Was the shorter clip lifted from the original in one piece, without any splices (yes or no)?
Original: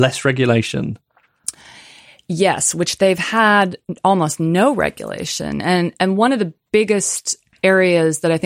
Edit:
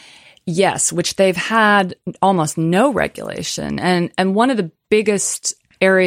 yes